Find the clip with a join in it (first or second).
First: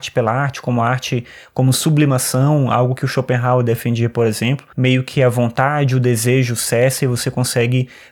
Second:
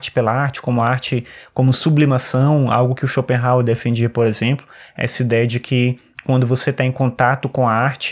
first